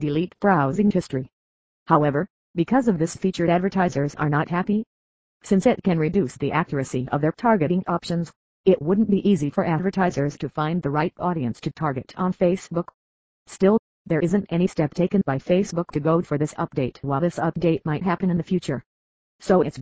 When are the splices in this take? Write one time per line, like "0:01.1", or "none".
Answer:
0:08.6